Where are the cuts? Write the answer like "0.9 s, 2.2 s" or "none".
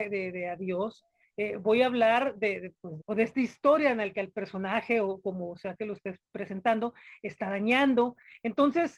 3.0 s